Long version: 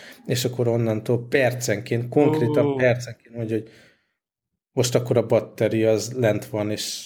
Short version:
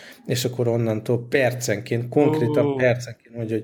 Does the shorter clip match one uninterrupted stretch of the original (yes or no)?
yes